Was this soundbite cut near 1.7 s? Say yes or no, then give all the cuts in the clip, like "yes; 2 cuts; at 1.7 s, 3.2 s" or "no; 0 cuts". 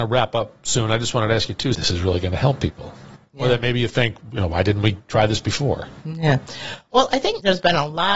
yes; 1 cut; at 1.7 s